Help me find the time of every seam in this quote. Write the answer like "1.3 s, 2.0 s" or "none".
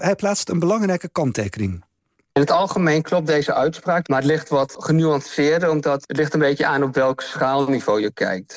none